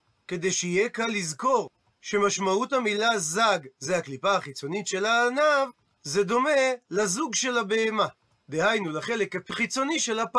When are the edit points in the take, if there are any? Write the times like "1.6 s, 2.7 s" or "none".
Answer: none